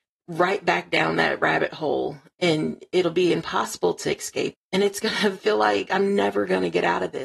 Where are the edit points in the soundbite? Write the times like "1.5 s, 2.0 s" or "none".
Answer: 4.5 s